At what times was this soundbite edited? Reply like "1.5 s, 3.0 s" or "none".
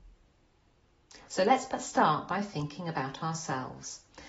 1.3 s